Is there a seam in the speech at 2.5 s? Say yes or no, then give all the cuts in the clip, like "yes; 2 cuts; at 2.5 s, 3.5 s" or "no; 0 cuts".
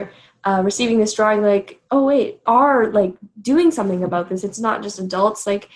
yes; 1 cut; at 2.5 s